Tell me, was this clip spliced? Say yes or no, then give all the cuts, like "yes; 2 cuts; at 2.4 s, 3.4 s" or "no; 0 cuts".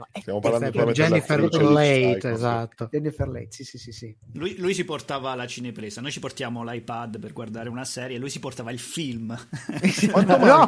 no; 0 cuts